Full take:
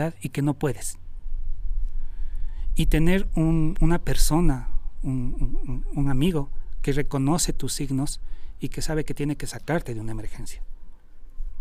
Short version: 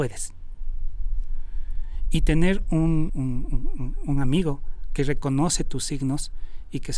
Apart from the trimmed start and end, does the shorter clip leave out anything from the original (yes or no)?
yes